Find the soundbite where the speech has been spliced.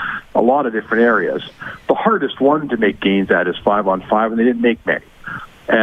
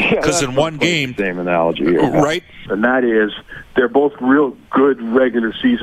second; 1 cut; at 2.6 s

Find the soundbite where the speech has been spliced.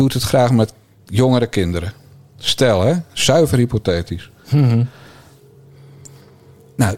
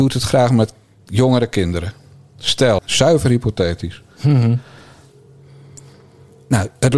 second; 1 cut; at 2.8 s

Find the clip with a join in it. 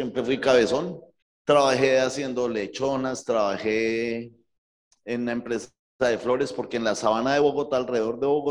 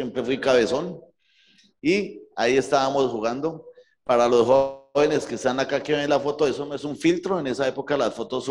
first; 1 cut; at 1.2 s

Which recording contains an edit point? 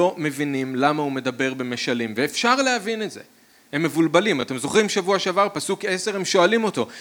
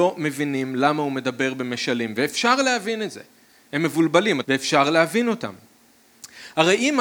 second; 1 cut; at 4.4 s

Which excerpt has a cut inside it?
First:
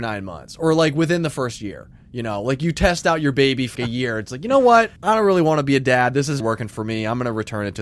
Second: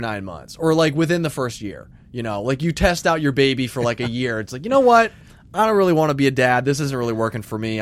first; 3 cuts; at 3.8 s, 5.0 s, 6.4 s

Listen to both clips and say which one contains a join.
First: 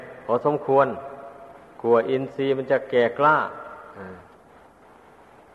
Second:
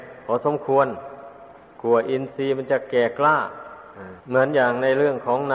second; 1 cut; at 4.2 s

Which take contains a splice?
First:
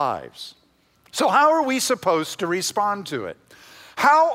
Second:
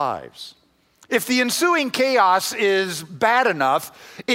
first; 1 cut; at 0.9 s

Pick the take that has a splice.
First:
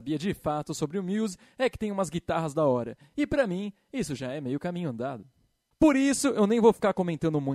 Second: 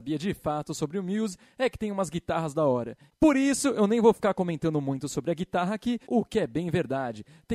second; 2 cuts; at 3.1 s, 6.1 s

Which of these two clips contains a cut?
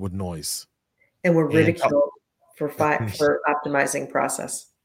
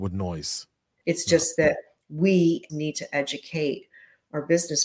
second; 2 cuts; at 1.0 s, 2.7 s

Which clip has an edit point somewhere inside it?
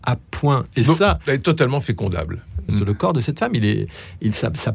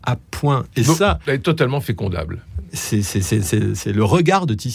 first; 1 cut; at 2.7 s

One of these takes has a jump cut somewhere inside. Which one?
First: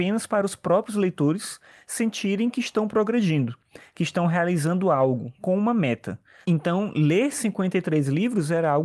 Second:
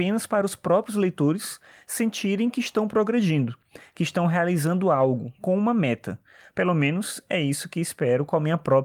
first; 1 cut; at 6.4 s

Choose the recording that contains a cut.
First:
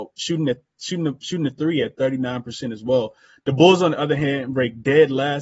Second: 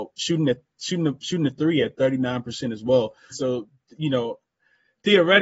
second; 1 cut; at 3.3 s

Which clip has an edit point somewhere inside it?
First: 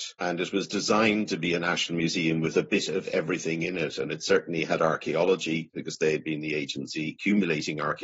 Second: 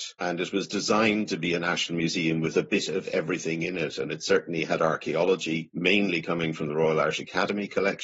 first; 1 cut; at 5.7 s

